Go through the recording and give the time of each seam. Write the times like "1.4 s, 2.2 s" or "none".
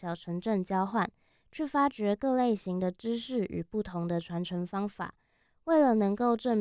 none